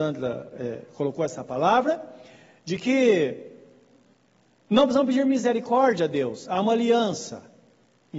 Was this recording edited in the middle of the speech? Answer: no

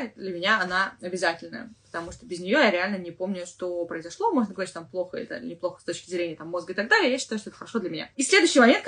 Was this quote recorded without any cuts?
yes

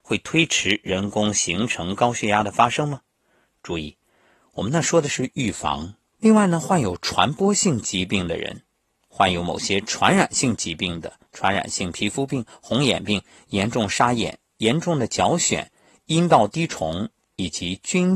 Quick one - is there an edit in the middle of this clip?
yes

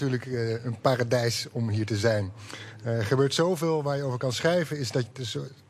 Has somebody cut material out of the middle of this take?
no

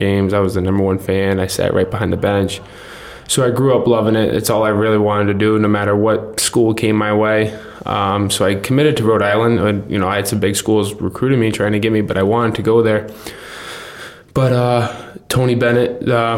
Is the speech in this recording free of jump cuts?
yes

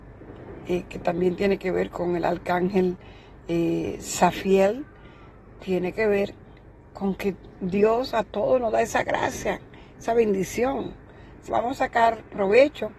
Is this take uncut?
no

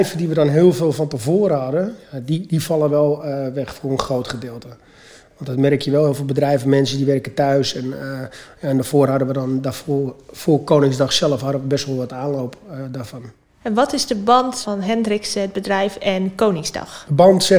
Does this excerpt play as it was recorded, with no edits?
yes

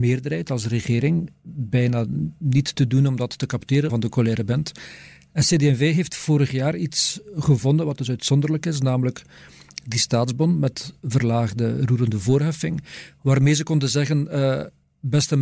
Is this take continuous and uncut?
no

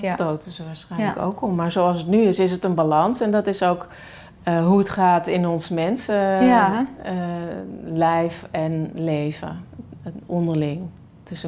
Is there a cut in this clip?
no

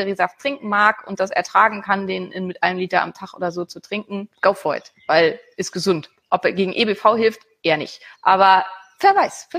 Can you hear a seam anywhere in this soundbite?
yes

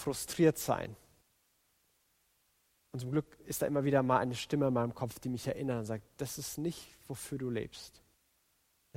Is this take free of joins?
yes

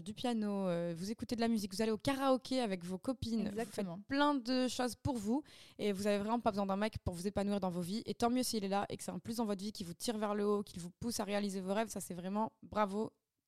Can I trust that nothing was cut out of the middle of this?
yes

